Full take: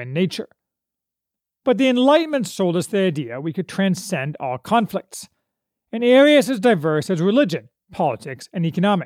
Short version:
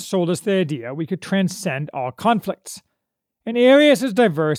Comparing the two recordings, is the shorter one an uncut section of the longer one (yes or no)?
yes